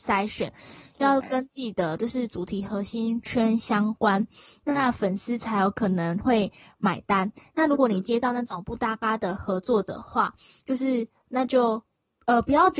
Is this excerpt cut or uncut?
uncut